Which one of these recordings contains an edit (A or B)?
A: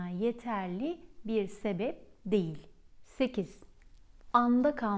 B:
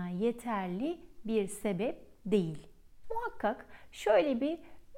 B